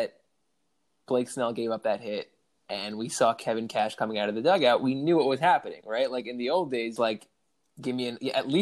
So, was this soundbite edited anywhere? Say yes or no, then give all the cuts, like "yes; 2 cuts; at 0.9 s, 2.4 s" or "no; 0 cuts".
yes; 1 cut; at 7.0 s